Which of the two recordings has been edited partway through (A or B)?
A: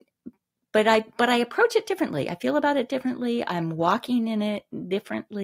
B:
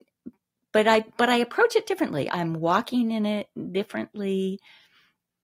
B